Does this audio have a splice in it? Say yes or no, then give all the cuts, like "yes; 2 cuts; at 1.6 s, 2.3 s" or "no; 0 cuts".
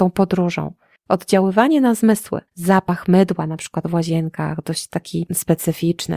yes; 2 cuts; at 1.0 s, 2.5 s